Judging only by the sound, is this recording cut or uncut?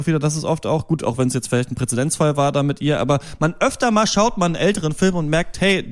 uncut